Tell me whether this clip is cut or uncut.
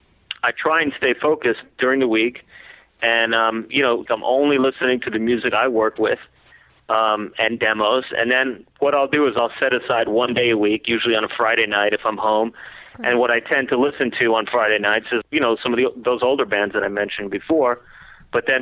cut